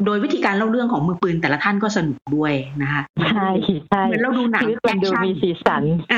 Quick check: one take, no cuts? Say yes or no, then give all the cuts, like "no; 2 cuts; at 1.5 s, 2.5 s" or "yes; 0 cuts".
yes; 0 cuts